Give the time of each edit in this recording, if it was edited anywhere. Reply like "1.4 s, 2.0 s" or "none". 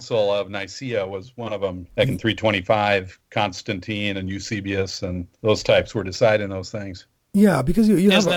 1.9 s, 5.3 s